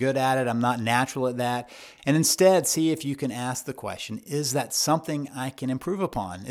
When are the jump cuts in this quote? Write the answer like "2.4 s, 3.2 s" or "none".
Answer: 2.0 s